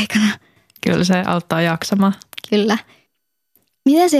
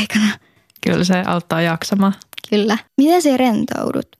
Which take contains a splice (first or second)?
second